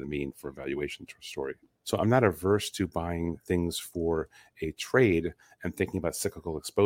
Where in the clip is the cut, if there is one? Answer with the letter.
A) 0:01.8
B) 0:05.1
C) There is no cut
A